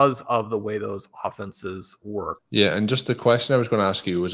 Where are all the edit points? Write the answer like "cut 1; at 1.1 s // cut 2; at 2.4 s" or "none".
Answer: cut 1; at 2.4 s